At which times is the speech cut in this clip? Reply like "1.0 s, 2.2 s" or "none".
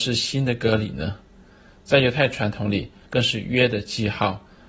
3.1 s